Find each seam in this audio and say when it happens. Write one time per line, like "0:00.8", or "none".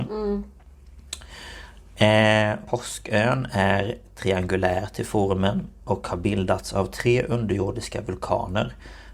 0:02.6